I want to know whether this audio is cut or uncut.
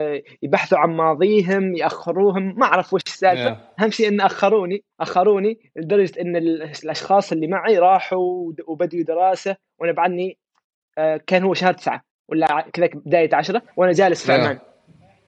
cut